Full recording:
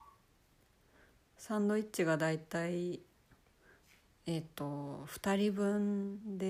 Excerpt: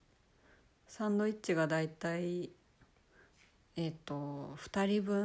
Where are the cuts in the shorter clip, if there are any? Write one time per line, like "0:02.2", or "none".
none